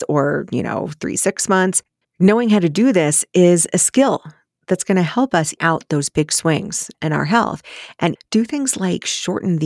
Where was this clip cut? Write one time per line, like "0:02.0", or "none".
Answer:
0:02.0
0:05.6
0:08.2